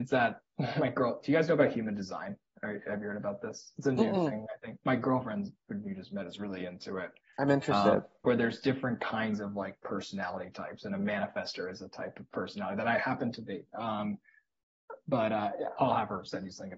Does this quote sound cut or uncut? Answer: cut